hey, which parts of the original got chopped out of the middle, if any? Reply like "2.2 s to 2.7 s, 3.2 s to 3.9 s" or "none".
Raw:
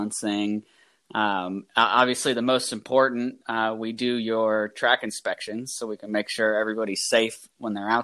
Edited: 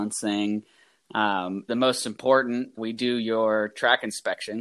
1.7 s to 2.3 s, 3.4 s to 3.8 s